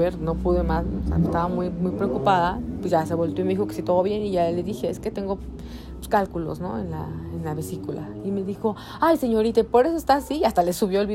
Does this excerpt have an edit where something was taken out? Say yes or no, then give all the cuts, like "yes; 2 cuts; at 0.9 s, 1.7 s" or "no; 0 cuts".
no; 0 cuts